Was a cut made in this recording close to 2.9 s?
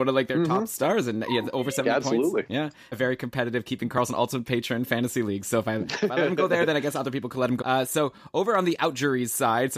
yes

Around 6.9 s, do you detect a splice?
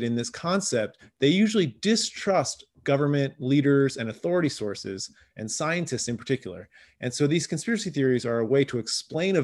no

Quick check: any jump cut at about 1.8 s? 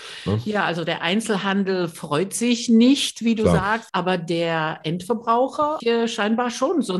no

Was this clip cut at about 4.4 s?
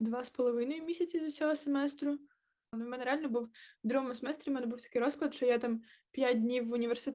no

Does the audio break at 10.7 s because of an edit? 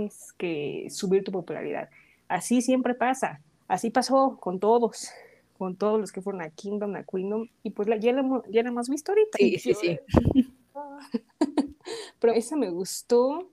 yes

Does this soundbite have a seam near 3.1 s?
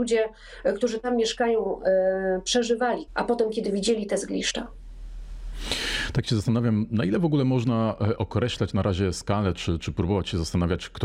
yes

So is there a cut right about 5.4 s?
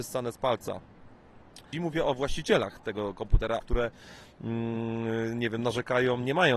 no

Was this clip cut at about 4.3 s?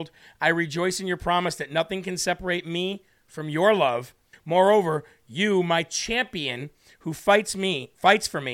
yes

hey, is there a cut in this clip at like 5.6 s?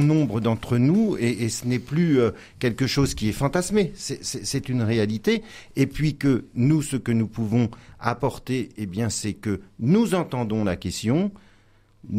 no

